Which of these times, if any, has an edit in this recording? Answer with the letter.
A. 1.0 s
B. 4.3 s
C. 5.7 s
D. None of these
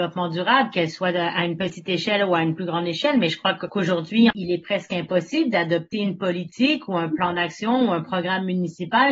B